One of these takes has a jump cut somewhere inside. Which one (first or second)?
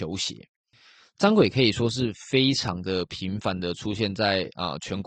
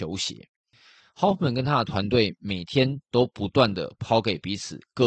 second